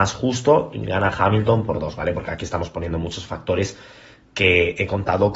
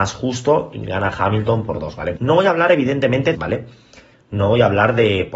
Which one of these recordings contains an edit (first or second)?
second